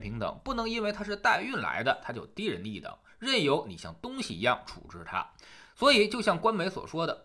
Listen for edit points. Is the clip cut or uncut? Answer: uncut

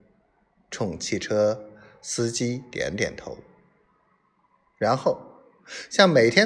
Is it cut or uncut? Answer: uncut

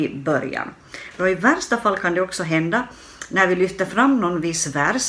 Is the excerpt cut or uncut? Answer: cut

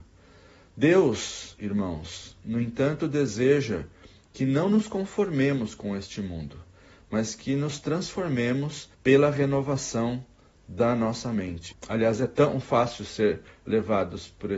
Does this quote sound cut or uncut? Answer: cut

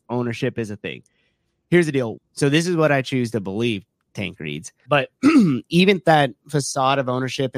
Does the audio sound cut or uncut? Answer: cut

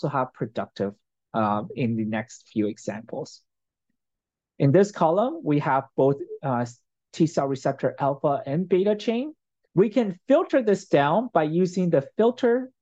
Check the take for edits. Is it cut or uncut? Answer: cut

